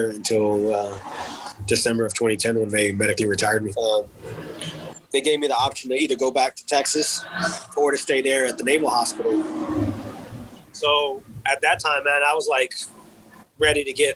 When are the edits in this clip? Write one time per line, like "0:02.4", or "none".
0:03.7